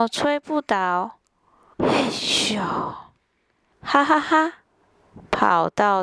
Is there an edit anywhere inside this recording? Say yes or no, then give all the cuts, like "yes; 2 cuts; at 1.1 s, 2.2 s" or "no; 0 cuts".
yes; 2 cuts; at 1.7 s, 3.7 s